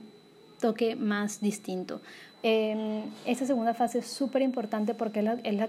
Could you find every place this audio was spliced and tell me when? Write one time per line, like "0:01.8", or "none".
0:02.3